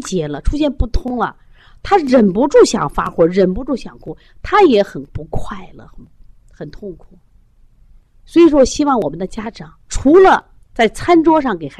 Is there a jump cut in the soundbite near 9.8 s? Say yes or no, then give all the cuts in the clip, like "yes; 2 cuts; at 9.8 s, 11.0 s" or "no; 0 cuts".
yes; 1 cut; at 9.8 s